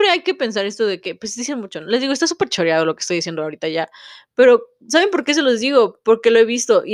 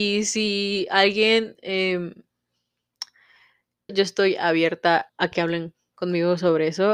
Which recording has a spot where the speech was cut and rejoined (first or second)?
second